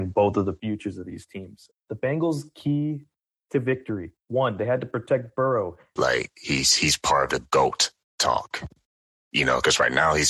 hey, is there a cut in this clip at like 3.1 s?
no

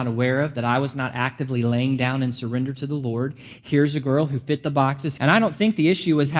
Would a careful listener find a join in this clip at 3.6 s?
no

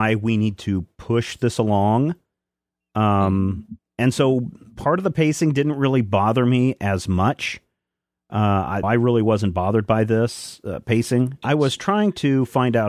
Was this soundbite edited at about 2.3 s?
no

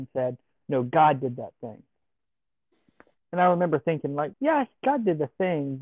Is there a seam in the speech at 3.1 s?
no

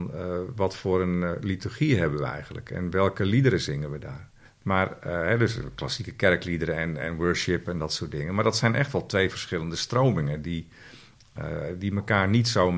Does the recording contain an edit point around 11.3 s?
no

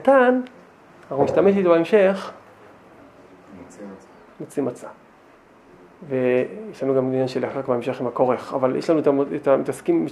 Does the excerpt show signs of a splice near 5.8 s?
no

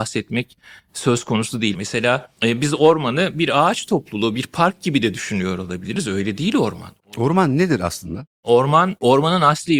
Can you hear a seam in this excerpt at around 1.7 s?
yes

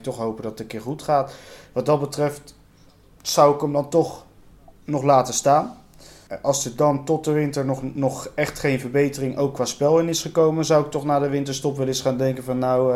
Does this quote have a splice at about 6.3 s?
yes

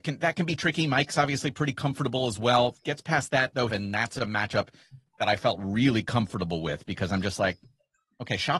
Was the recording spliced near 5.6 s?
no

